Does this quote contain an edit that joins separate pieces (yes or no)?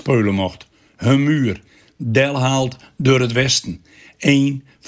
no